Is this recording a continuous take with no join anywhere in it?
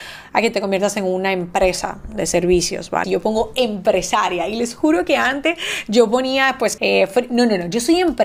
no; 2 cuts; at 3.0 s, 6.8 s

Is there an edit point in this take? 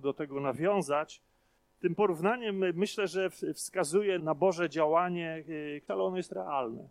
yes; 2 cuts; at 4.2 s, 5.9 s

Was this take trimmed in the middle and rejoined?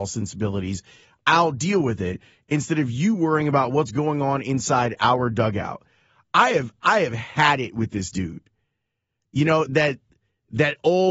yes; 1 cut; at 9.7 s

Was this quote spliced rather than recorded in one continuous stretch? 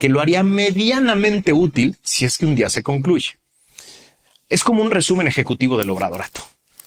no; 0 cuts

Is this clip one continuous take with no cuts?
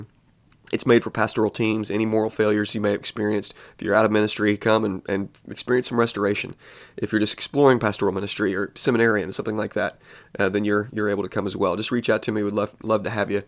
yes; 0 cuts

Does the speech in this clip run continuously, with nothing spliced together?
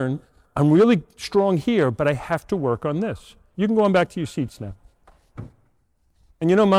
no; 1 cut; at 3.5 s

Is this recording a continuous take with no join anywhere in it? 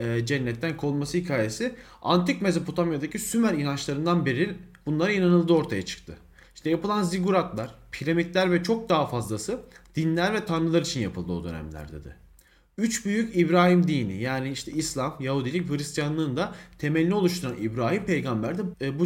no; 1 cut; at 6.4 s

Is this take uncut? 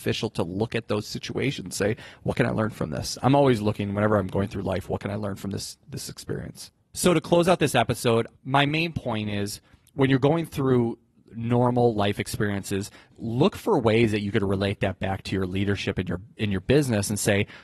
no; 3 cuts; at 6.8 s, 8.4 s, 13.1 s

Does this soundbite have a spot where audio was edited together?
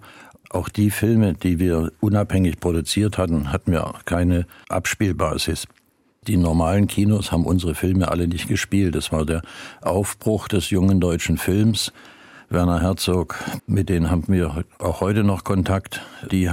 yes; 1 cut; at 13.6 s

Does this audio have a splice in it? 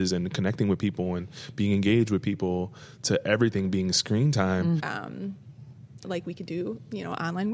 yes; 2 cuts; at 4.8 s, 6.0 s

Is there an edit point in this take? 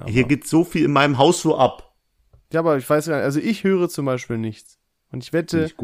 no; 0 cuts

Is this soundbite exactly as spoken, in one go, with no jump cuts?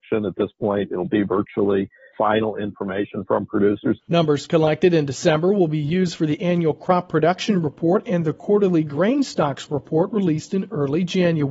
no; 2 cuts; at 2.1 s, 4.0 s

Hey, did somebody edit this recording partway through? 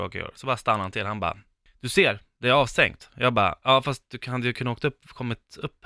no; 0 cuts

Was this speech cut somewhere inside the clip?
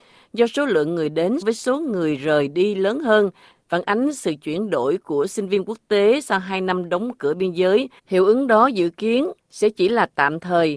yes; 2 cuts; at 1.4 s, 8.0 s

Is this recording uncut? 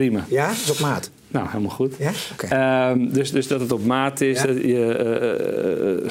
no; 1 cut; at 1.2 s

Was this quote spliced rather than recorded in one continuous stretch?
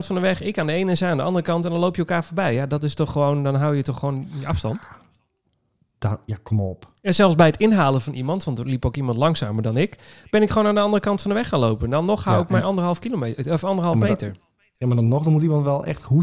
no; 0 cuts

